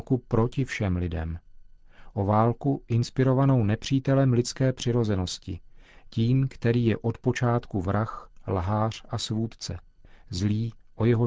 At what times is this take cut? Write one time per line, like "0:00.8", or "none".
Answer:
none